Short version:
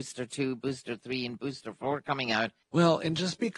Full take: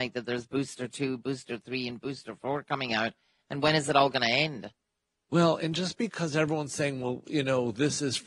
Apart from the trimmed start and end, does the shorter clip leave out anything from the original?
yes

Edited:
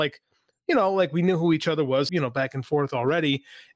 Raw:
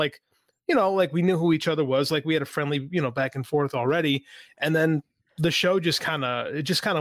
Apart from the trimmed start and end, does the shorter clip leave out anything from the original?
yes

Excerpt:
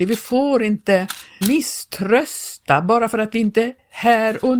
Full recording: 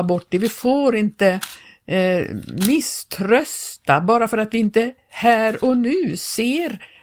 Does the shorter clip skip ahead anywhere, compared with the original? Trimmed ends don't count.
yes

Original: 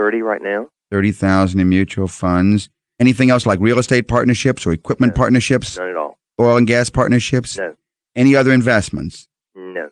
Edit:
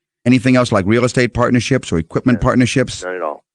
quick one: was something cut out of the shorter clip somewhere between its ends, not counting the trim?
no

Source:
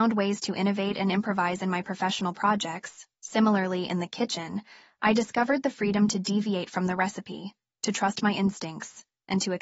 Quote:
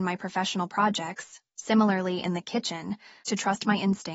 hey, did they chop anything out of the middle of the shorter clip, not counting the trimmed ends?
yes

